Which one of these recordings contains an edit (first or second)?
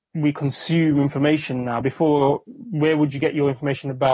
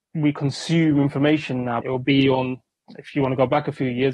second